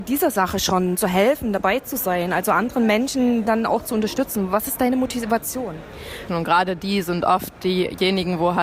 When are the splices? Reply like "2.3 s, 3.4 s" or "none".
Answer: 3.5 s, 6.3 s